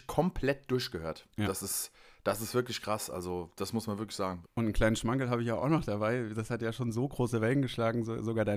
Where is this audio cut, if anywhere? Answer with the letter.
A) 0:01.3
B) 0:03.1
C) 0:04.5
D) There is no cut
C